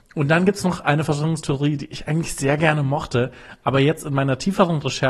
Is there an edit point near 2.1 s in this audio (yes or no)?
no